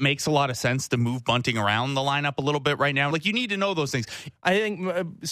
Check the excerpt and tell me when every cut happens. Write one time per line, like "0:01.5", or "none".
0:03.1
0:04.4